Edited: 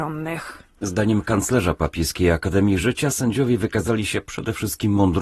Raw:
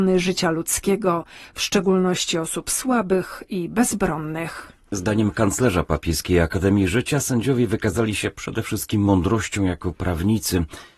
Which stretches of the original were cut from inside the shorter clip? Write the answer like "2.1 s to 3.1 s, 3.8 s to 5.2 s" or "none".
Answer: none